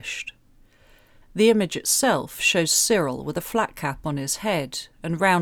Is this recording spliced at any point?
yes; 1 cut; at 1.2 s

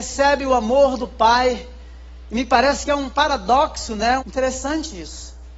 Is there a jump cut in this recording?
yes; 1 cut; at 4.2 s

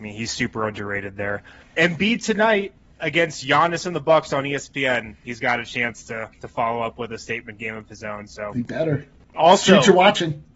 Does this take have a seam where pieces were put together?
yes; 2 cuts; at 1.6 s, 9.3 s

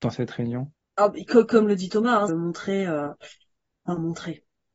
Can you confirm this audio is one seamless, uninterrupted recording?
no; 1 cut; at 2.3 s

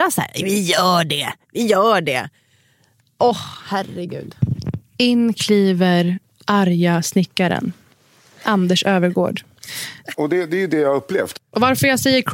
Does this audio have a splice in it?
yes; 1 cut; at 10.1 s

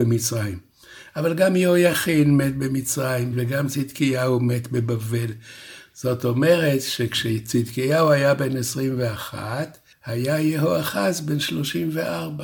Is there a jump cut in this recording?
yes; 2 cuts; at 3.3 s, 5.9 s

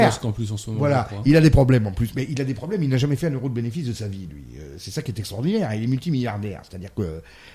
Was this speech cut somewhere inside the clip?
no; 0 cuts

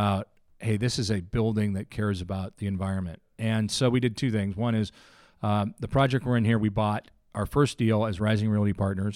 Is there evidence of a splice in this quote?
no; 0 cuts

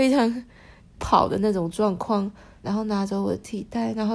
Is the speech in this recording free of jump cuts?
no; 2 cuts; at 1.0 s, 2.6 s

